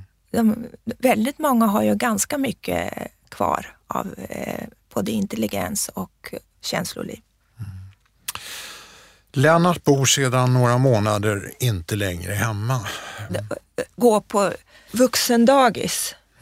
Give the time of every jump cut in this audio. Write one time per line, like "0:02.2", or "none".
0:06.5
0:13.3
0:14.9